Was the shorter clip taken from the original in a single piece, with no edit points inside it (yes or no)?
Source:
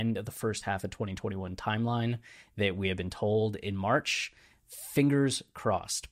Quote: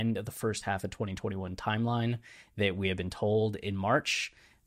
yes